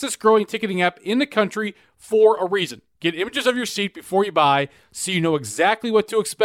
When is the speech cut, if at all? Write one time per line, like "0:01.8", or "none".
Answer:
none